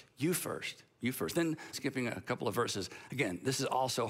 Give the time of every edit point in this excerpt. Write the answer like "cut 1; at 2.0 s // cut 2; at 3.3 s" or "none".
cut 1; at 1.7 s